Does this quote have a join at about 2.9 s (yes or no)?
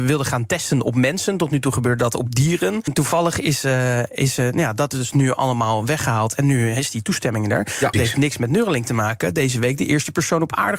yes